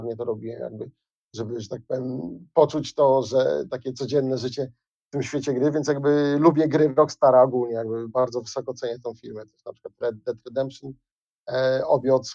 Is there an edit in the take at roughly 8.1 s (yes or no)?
yes